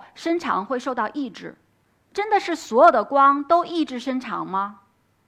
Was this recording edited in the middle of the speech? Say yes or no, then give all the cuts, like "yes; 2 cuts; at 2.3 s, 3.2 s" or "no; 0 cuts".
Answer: no; 0 cuts